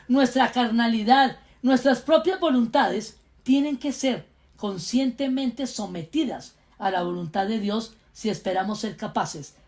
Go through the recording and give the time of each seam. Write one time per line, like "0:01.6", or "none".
none